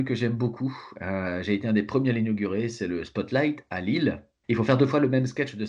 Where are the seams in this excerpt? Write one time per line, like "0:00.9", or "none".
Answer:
0:04.4